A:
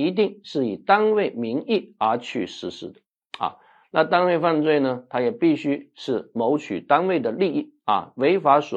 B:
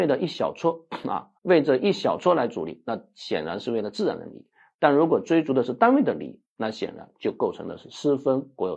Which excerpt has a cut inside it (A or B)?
B